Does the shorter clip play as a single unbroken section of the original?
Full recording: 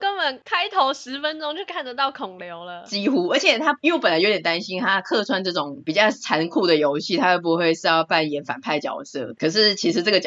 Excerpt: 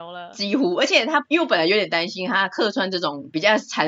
yes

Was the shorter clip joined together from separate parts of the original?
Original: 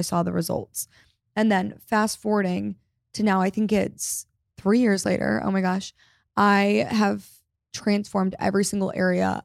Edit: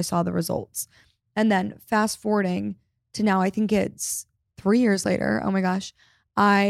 no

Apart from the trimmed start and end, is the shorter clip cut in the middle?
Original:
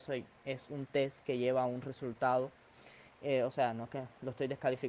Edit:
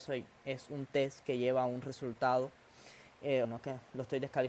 yes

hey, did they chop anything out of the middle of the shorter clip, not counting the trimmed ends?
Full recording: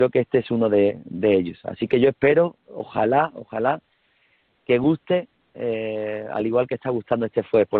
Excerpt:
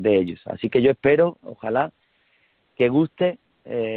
yes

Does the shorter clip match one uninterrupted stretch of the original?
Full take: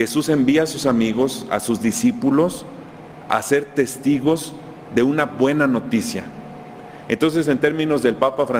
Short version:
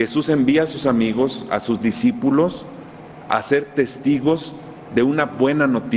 yes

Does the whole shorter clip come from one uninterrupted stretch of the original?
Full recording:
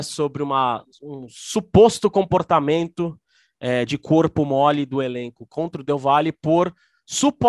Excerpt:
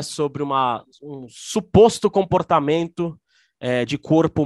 yes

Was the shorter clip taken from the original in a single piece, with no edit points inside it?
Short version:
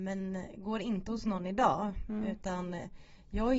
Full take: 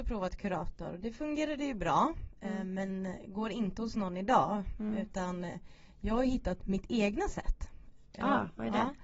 yes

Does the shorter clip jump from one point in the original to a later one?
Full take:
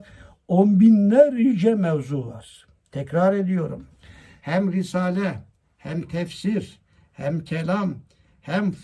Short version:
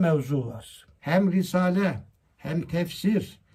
yes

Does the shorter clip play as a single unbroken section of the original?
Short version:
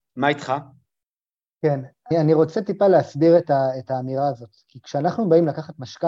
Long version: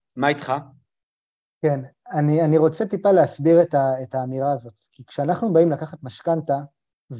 no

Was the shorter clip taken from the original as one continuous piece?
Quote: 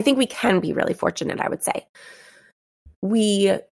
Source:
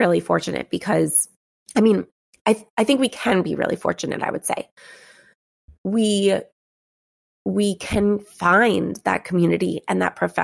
yes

